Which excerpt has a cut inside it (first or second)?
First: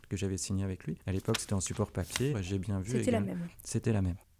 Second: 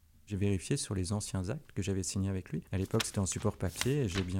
first